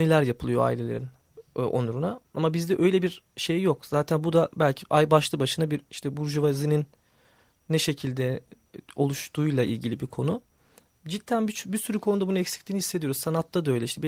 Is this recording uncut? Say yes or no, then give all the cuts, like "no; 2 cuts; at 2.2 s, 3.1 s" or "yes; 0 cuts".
yes; 0 cuts